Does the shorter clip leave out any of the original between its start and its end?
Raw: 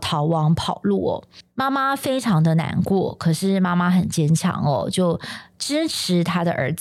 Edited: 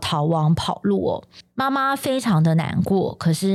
no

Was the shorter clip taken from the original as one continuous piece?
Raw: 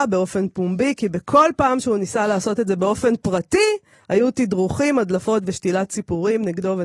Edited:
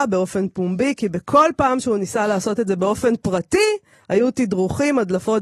yes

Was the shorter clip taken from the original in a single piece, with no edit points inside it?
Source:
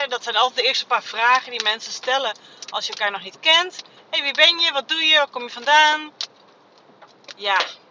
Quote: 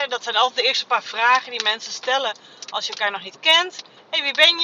yes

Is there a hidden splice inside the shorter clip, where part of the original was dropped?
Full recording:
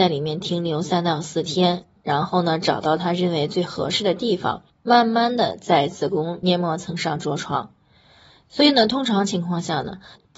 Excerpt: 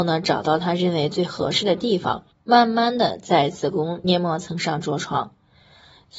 no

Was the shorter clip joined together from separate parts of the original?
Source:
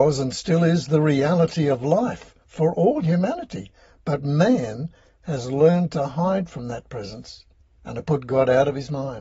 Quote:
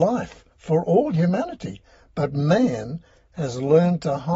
no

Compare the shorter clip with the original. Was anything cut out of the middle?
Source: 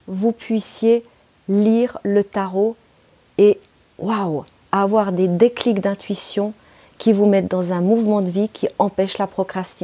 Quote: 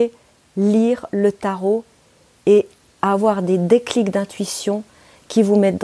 yes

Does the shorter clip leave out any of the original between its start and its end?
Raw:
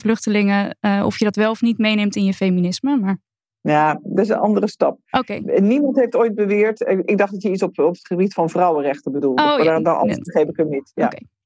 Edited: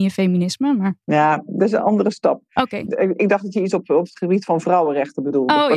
yes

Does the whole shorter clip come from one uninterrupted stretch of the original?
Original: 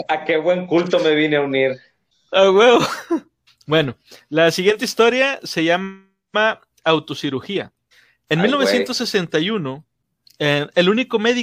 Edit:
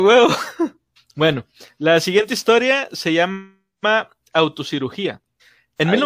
yes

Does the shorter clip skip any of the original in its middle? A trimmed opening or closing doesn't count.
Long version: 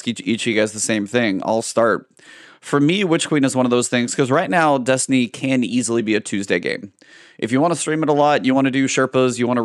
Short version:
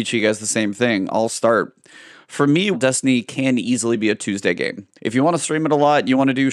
yes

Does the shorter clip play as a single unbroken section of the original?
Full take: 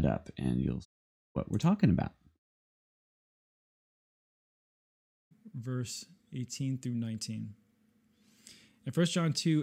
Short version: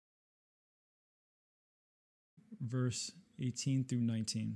yes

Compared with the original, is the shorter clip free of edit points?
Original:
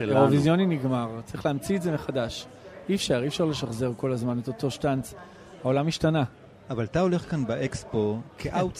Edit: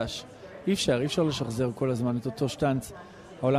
yes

